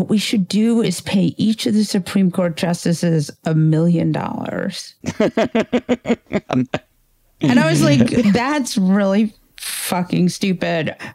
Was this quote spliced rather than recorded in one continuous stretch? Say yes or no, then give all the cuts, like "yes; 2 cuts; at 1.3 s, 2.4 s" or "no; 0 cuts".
no; 0 cuts